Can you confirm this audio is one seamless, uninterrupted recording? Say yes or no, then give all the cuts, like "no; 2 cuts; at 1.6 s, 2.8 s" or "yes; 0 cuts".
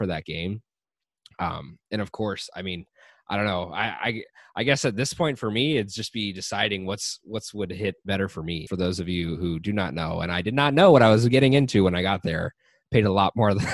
no; 1 cut; at 8.7 s